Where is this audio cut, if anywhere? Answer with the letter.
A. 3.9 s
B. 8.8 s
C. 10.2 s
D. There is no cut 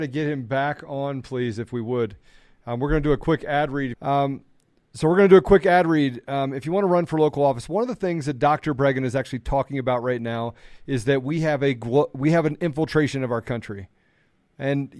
A